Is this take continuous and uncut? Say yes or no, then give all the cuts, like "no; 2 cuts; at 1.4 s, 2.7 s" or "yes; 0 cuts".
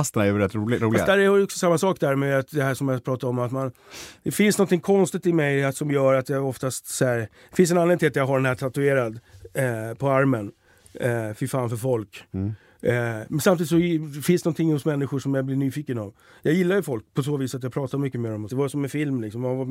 no; 1 cut; at 18.5 s